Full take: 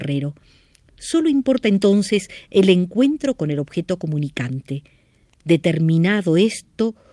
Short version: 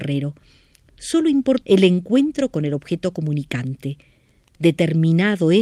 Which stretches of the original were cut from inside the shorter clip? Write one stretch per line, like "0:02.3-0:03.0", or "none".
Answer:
0:01.6-0:02.5